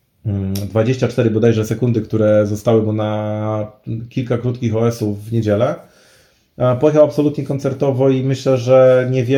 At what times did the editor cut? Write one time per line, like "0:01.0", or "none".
none